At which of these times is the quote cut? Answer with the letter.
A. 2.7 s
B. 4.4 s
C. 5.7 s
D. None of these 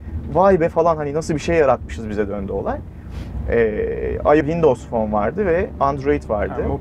B